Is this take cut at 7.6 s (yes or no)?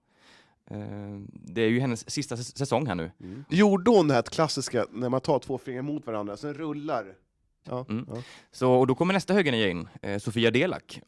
yes